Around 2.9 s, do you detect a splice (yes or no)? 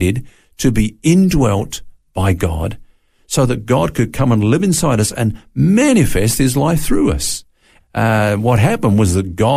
no